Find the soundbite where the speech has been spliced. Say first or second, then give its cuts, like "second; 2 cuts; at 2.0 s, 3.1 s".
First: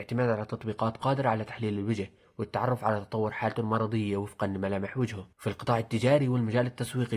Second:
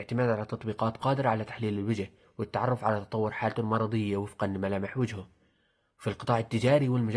first; 1 cut; at 5.3 s